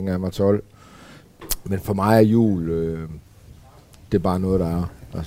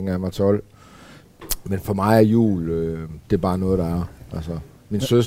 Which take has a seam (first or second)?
second